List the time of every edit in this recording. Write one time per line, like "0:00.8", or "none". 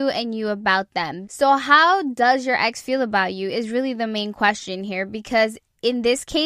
0:01.2